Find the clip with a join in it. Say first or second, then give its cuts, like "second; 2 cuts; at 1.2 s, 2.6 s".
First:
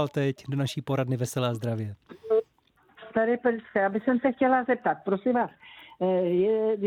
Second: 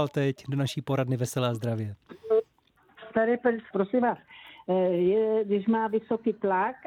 second; 1 cut; at 3.7 s